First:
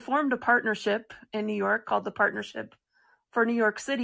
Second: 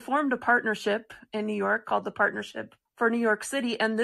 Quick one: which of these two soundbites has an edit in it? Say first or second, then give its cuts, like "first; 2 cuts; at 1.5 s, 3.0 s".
second; 1 cut; at 2.9 s